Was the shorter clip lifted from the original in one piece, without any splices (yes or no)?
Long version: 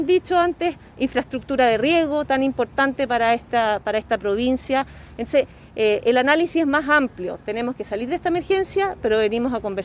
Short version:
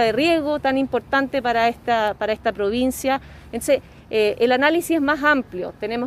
yes